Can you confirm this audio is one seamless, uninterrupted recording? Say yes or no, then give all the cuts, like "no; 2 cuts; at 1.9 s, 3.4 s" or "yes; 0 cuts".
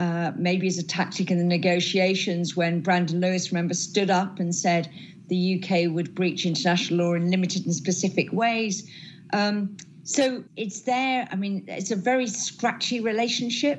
no; 1 cut; at 10.5 s